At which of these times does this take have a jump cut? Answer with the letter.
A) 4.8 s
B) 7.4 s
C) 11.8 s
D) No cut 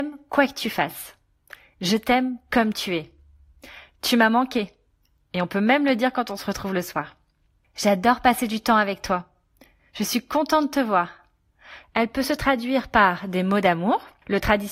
C